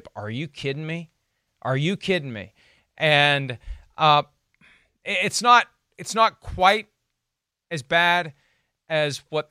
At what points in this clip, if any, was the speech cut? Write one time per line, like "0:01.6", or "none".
0:01.5